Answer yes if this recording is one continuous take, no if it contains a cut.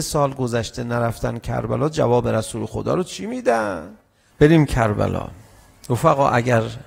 no